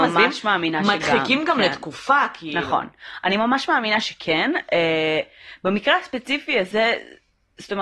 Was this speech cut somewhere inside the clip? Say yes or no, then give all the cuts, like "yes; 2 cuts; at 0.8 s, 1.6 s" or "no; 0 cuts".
no; 0 cuts